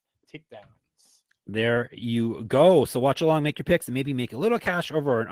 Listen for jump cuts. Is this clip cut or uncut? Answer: uncut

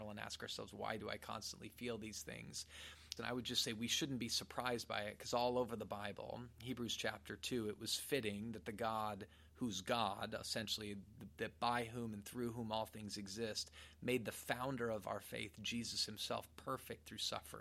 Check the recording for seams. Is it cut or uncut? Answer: cut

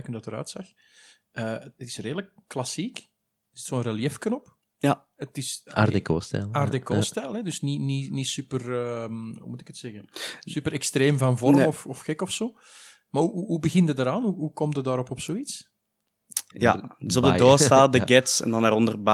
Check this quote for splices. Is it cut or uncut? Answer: cut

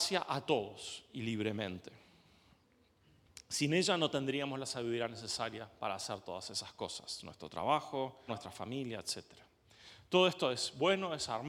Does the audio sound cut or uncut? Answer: cut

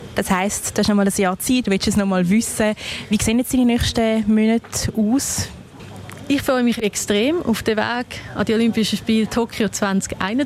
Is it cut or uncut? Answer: cut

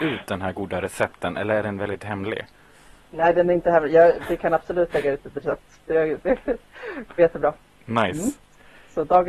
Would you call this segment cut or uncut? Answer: uncut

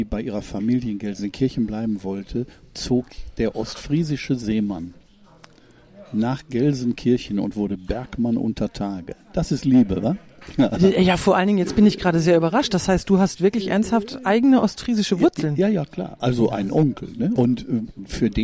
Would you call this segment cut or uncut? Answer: cut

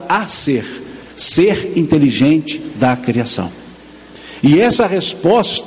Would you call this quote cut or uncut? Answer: cut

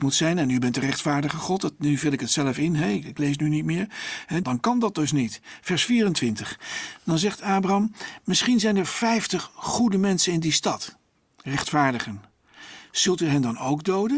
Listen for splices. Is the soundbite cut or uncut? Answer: cut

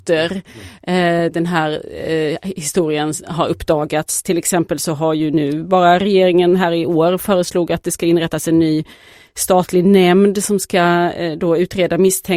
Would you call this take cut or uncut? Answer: uncut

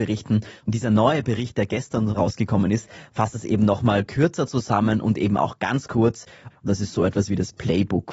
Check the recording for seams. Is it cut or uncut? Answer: cut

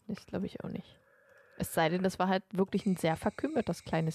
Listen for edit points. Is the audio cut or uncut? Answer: uncut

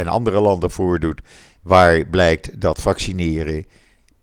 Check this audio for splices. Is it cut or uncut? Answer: uncut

